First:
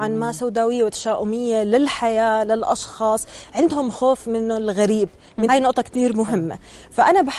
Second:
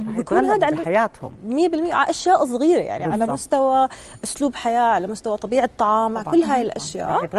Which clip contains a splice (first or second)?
first